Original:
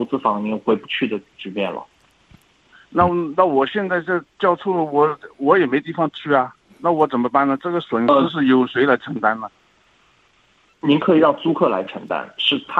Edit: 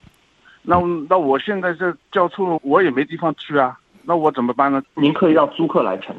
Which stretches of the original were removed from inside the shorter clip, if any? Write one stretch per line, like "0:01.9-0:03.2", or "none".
0:04.9-0:05.3
0:07.6-0:10.7